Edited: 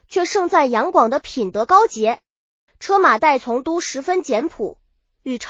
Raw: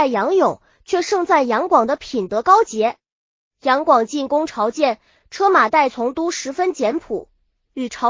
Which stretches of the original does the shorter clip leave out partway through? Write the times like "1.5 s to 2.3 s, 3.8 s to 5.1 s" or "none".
3.4 s to 5.2 s